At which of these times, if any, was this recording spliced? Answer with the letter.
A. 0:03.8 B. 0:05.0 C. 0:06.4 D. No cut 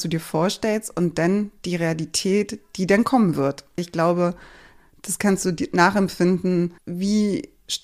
A